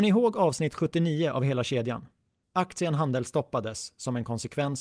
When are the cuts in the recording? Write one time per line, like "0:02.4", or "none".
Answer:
0:02.4